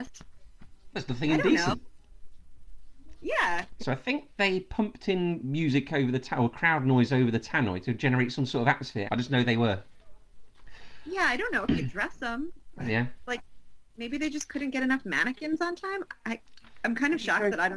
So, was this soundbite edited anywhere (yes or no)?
yes